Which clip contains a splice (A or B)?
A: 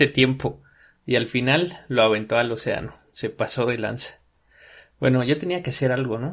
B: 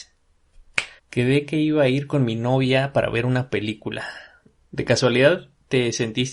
B